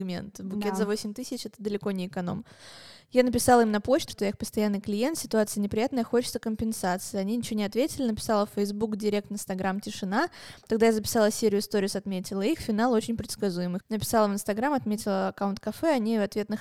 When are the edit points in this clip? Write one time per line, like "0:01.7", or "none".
0:04.1
0:13.8